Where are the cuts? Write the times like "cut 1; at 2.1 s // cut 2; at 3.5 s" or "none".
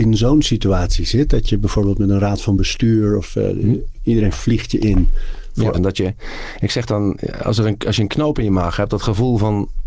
cut 1; at 5.7 s